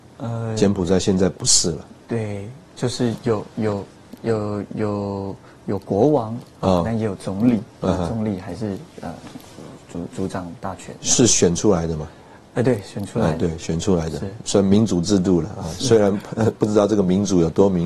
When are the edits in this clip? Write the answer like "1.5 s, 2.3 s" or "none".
none

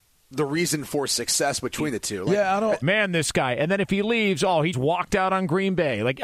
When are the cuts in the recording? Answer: 2.8 s, 4.7 s

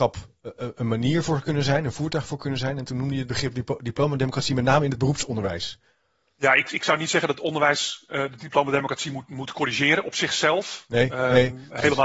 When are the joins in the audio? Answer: none

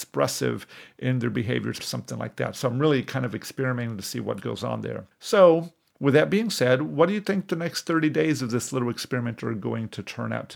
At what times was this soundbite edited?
1.8 s, 5.1 s

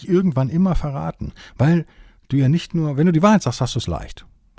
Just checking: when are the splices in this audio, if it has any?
none

